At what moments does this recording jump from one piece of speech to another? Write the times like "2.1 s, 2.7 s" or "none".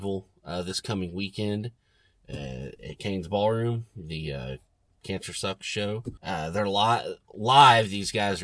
6.2 s